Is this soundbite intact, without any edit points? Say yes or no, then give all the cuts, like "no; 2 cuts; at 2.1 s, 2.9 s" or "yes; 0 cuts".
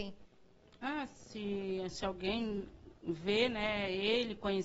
yes; 0 cuts